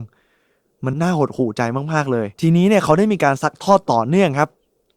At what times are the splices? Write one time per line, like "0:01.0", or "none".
0:00.9
0:02.3